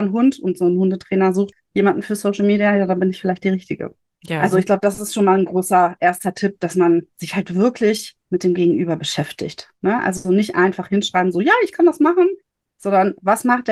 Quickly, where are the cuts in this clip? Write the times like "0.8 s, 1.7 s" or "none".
none